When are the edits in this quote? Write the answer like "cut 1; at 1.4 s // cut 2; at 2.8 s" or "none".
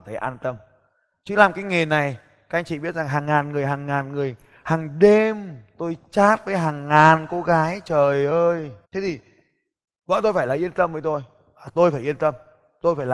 cut 1; at 8.8 s